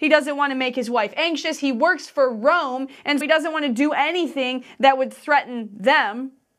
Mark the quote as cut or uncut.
cut